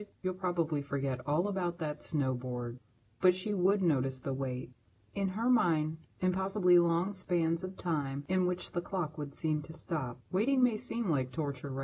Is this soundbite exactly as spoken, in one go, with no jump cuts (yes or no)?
no